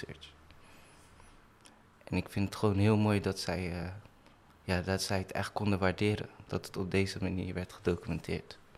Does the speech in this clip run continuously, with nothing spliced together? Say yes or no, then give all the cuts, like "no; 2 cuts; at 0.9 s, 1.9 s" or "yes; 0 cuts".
yes; 0 cuts